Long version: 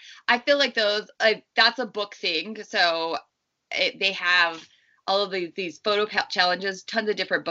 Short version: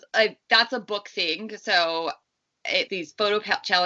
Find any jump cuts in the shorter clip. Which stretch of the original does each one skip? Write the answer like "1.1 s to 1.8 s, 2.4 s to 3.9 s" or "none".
3.9 s to 5.5 s

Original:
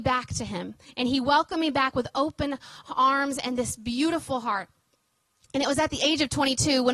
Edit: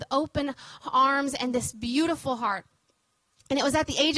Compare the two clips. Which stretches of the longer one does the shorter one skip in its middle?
none

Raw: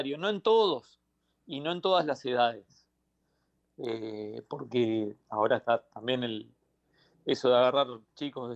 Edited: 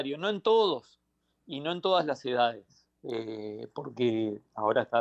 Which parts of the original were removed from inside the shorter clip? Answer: 3.0 s to 3.7 s

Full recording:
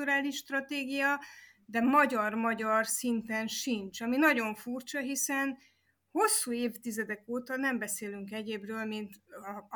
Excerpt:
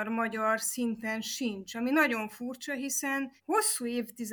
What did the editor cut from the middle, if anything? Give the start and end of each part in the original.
5.6 s to 6.0 s

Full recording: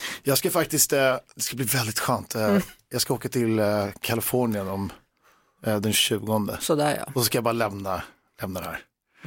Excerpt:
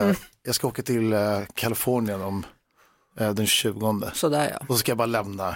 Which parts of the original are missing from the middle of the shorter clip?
none

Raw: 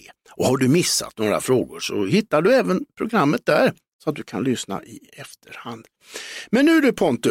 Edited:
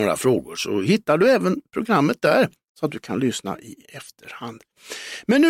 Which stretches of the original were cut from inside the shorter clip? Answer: none

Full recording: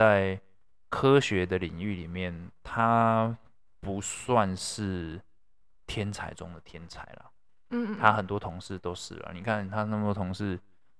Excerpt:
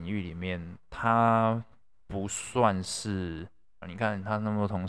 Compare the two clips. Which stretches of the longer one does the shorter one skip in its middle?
5.6 s to 9.3 s

